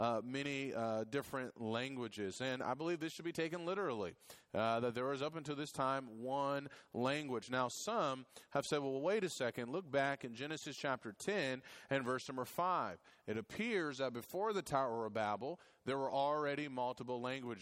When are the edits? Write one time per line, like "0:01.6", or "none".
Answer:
none